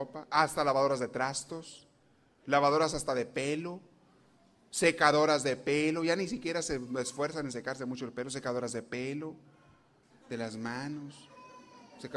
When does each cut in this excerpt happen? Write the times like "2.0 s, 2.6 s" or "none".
10.1 s